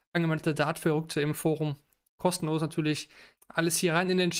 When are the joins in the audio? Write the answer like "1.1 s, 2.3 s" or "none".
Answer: 3.4 s